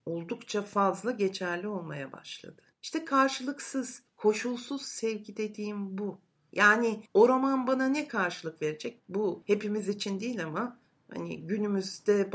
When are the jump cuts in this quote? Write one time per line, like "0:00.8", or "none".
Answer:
0:02.7
0:09.0